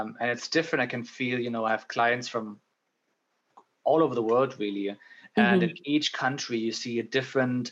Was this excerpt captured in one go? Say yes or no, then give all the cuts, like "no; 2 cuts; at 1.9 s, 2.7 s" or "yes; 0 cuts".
yes; 0 cuts